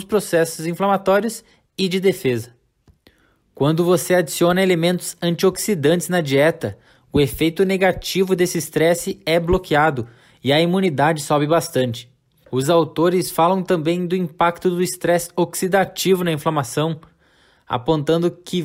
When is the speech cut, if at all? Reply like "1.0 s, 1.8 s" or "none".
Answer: 12.4 s